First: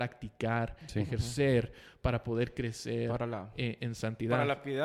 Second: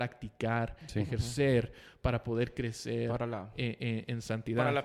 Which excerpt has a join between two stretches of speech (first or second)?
first